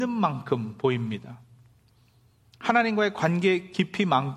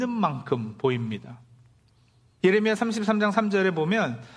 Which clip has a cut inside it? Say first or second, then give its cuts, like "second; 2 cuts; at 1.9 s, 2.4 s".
second; 1 cut; at 2.4 s